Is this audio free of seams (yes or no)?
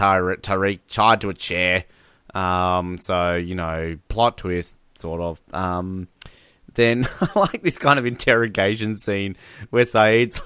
yes